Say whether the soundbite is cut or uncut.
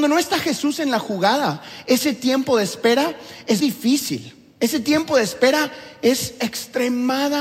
cut